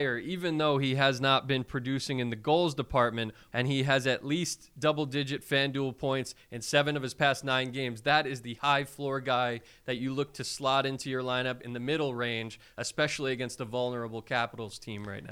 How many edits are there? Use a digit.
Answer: 1